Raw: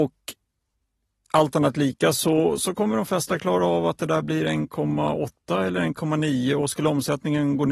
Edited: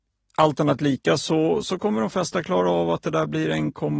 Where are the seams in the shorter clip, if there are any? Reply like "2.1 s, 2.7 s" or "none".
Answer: none

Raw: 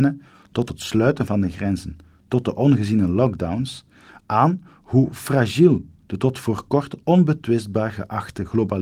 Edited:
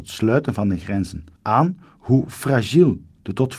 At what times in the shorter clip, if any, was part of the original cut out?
1.4 s

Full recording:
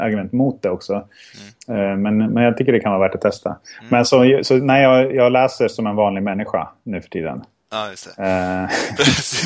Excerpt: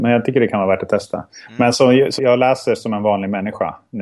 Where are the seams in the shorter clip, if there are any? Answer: 2.2 s

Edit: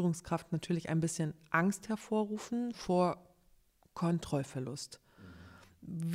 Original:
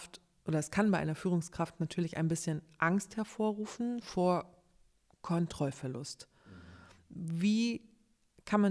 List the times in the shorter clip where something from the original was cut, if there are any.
none

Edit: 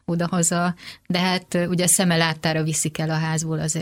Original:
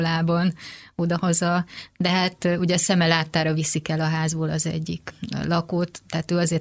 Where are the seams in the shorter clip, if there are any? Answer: none

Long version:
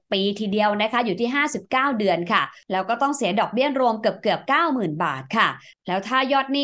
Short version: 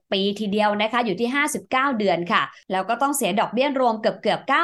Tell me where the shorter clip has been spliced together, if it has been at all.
none

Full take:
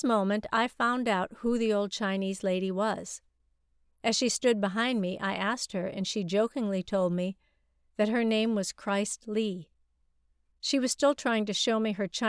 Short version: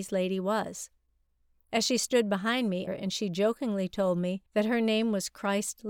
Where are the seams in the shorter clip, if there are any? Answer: 2.9 s, 4.5 s

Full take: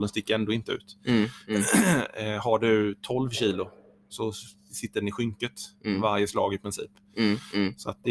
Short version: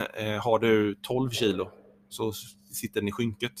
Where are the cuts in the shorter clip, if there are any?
none

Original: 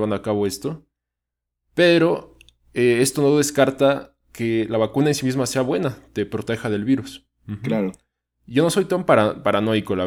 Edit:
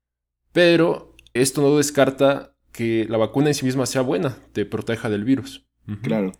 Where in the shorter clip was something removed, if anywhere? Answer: 1.4 s

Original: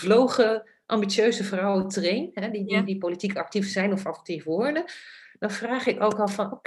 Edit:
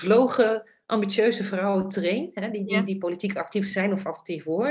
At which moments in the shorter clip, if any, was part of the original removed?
none

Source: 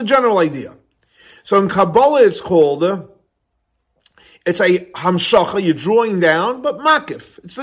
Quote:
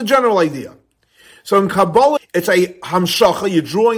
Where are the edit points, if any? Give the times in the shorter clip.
2.2 s

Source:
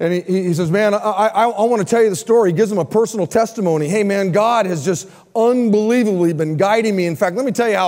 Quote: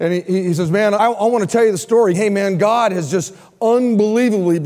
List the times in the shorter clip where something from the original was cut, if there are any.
1.0 s, 2.1 s

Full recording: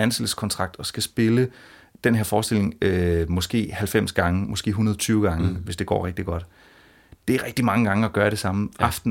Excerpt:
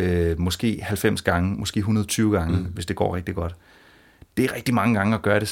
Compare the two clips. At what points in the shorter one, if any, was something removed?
none

